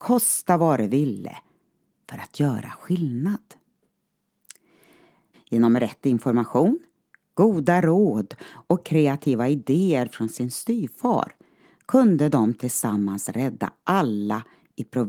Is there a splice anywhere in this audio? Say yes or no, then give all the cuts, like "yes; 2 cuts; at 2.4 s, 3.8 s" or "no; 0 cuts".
yes; 1 cut; at 5.3 s